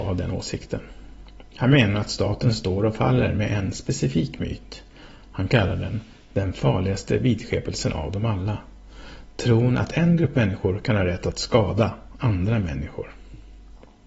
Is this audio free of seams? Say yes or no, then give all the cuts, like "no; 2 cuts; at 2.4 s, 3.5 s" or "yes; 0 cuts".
yes; 0 cuts